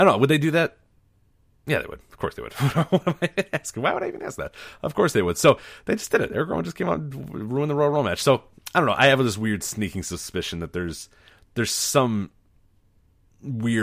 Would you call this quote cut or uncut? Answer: uncut